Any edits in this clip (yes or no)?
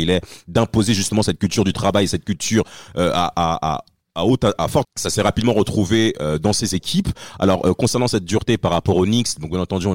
yes